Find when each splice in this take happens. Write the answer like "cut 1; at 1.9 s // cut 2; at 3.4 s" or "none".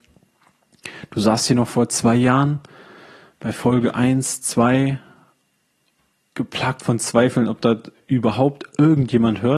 none